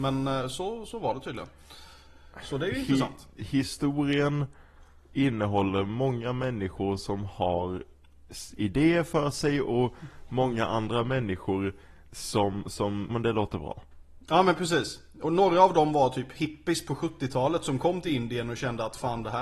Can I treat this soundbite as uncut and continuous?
no; 1 cut; at 13.1 s

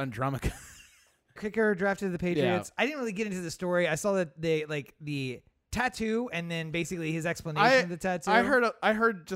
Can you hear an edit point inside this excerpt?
yes; 1 cut; at 1.4 s

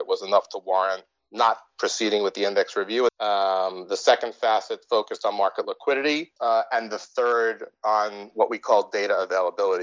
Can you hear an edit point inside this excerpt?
yes; 2 cuts; at 3.1 s, 6.4 s

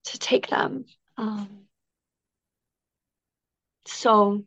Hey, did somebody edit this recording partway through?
yes; 1 cut; at 1.1 s

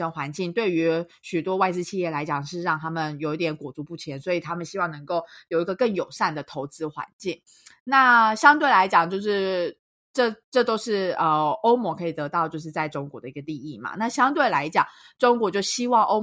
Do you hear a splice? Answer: no; 0 cuts

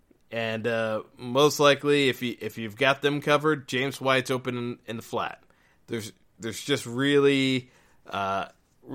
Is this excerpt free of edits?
yes; 0 cuts

